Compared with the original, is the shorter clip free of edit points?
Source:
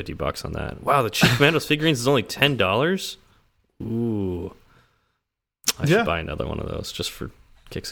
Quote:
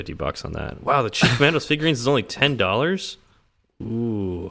yes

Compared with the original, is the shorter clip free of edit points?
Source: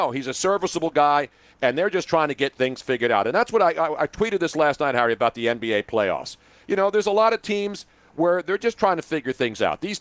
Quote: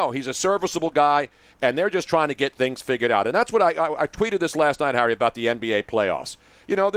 yes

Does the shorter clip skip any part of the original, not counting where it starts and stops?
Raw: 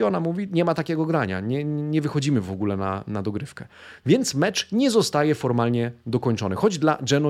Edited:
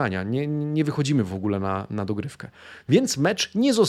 no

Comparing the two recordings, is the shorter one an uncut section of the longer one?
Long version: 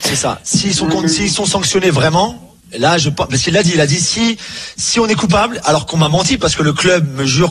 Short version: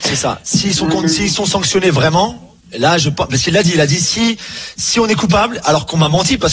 yes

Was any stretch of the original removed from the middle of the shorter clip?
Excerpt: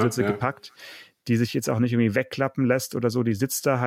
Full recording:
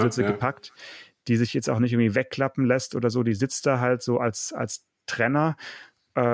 no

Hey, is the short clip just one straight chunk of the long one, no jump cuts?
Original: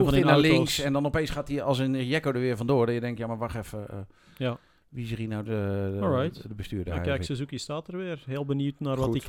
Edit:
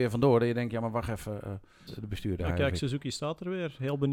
no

